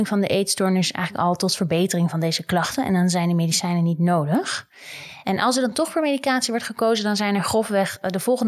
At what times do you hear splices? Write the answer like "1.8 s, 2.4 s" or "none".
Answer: none